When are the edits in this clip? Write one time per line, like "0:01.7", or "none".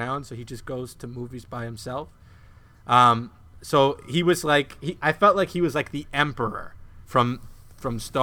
none